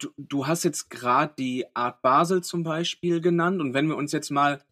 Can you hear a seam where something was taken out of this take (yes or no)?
no